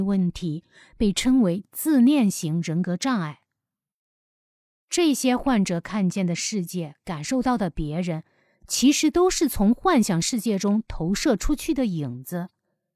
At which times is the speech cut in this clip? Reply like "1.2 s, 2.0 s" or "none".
none